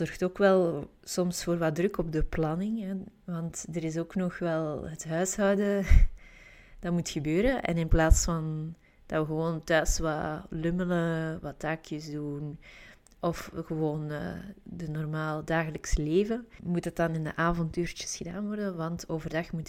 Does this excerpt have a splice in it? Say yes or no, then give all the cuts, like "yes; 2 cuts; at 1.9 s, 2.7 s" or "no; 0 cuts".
no; 0 cuts